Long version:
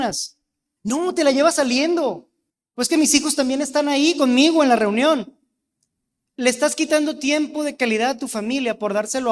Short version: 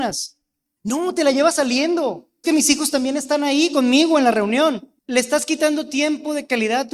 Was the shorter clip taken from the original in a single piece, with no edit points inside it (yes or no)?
no